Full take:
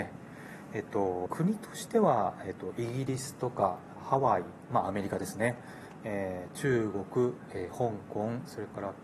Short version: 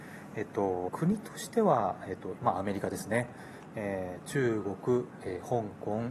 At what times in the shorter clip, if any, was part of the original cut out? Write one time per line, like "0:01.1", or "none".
0:02.4